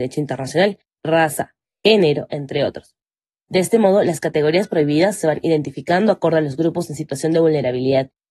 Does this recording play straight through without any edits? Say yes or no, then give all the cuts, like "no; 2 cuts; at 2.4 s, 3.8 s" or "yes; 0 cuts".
no; 2 cuts; at 1.0 s, 2.3 s